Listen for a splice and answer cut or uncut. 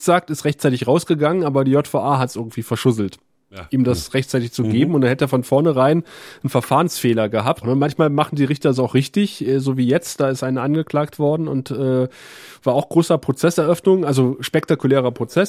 cut